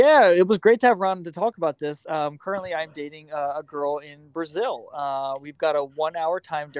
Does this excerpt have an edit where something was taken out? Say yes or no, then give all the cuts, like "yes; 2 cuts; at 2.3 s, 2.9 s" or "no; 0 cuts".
no; 0 cuts